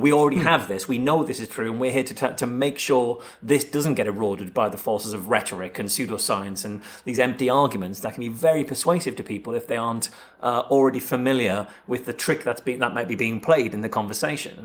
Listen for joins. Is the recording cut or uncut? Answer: uncut